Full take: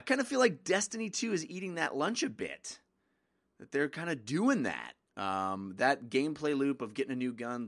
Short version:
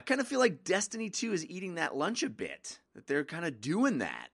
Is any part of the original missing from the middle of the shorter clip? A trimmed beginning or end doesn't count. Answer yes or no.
yes